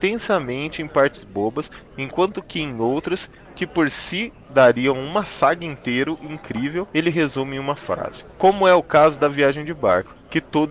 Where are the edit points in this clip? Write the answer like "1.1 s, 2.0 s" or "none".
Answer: none